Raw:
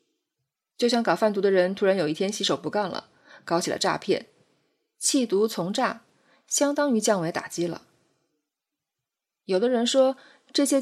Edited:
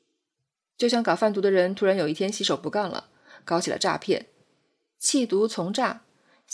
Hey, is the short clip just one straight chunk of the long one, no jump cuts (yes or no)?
yes